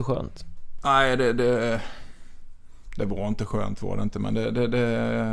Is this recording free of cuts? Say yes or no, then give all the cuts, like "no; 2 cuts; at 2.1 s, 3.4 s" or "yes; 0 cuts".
yes; 0 cuts